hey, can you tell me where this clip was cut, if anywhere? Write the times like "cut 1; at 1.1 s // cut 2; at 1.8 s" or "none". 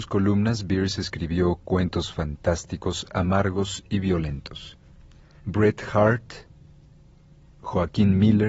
cut 1; at 5.4 s